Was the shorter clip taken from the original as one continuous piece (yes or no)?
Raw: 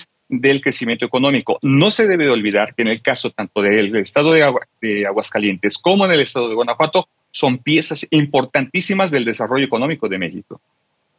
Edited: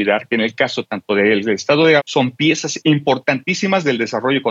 no